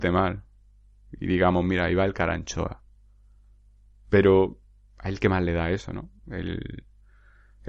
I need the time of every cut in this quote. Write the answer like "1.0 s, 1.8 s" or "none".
none